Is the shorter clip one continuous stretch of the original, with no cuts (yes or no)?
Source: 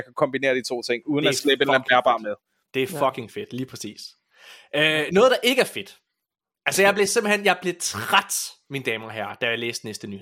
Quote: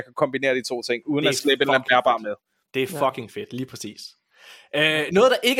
yes